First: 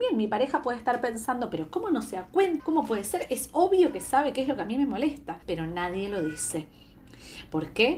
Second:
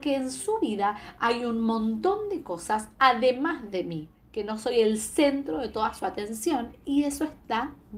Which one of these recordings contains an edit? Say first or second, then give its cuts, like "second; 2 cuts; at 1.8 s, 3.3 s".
first; 2 cuts; at 2.6 s, 5.4 s